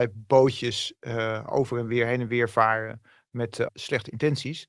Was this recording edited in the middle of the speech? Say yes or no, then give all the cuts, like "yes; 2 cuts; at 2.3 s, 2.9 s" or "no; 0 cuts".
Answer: yes; 1 cut; at 3.7 s